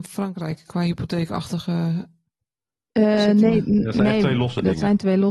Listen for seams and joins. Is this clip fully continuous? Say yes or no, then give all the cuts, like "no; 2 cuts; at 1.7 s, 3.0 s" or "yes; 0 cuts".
yes; 0 cuts